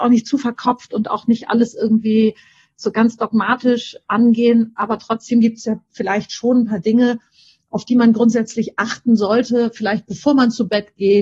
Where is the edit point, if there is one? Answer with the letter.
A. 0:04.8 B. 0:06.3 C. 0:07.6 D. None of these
D